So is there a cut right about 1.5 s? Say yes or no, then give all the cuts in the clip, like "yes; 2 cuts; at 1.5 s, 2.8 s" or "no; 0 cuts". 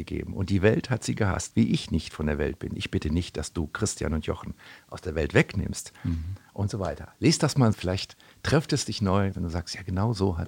yes; 3 cuts; at 1.5 s, 7.7 s, 9.3 s